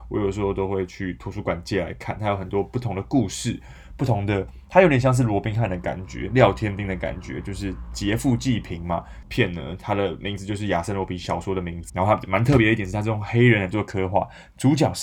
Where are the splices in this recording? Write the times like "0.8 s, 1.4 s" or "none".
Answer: 9.2 s, 11.9 s